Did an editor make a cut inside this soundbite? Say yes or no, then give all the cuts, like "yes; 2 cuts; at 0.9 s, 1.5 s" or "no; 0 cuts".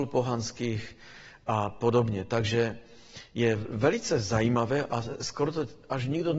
no; 0 cuts